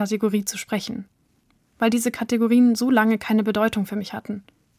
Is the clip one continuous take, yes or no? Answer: yes